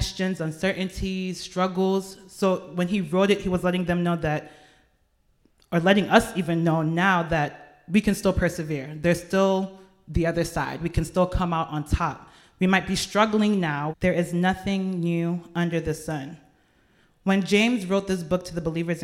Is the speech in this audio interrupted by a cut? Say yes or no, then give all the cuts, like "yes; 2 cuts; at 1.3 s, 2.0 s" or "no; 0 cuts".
yes; 1 cut; at 13.9 s